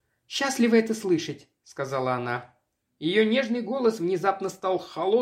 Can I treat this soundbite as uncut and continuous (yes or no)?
no